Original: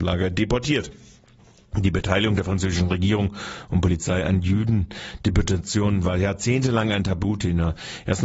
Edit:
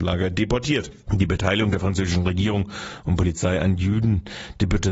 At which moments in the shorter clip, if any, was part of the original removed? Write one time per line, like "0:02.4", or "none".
0:01.0